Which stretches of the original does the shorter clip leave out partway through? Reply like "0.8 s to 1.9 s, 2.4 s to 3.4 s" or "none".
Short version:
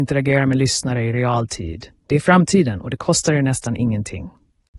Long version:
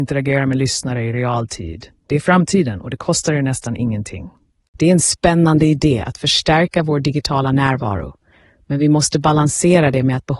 none